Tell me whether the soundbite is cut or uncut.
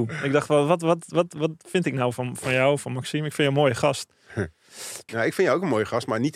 cut